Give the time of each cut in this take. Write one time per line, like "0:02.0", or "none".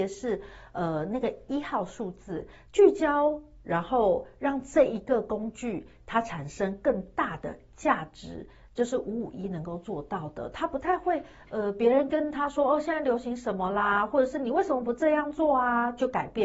0:02.7